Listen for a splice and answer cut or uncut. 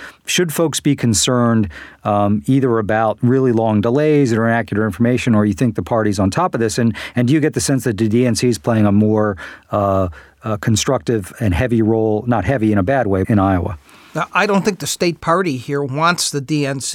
cut